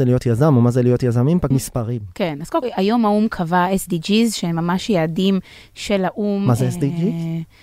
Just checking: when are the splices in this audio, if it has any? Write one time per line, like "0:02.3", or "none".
0:01.5
0:02.6

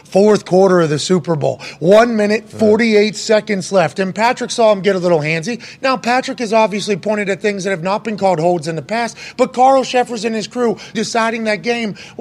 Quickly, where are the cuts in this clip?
0:10.9

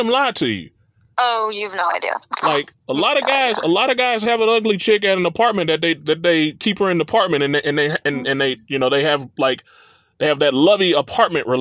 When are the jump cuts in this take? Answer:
none

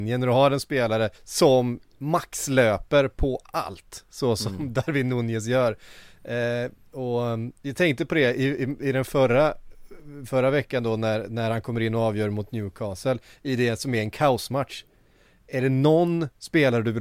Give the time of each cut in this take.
0:01.1

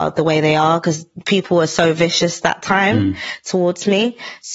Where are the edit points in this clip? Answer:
none

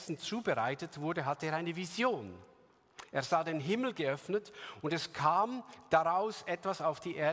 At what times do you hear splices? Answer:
none

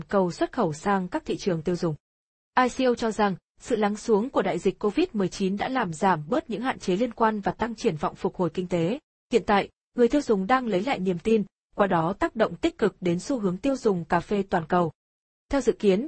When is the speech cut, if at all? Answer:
none

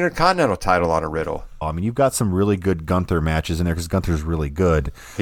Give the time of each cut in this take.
0:01.6

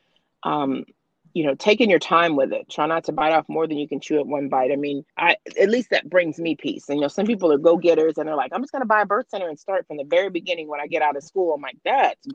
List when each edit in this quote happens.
0:05.1

